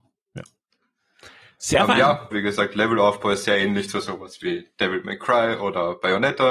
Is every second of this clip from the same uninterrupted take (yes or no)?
no